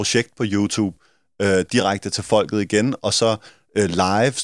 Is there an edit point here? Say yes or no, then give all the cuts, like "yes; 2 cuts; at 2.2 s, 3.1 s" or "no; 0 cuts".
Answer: no; 0 cuts